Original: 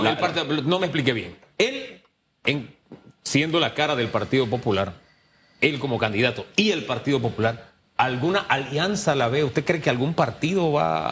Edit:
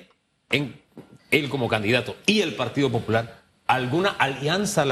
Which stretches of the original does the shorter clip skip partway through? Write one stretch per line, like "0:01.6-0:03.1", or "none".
0:03.1-0:05.5